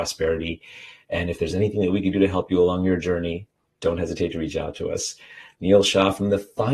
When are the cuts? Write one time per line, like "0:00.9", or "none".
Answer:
none